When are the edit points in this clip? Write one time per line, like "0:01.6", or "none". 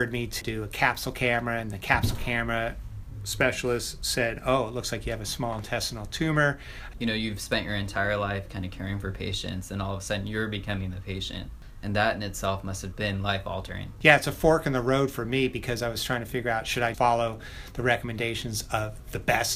0:06.9
0:12.9
0:16.9